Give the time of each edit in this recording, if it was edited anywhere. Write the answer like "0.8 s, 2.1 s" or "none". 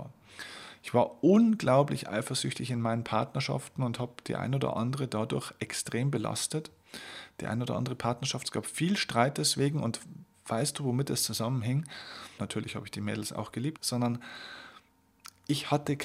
12.4 s, 13.8 s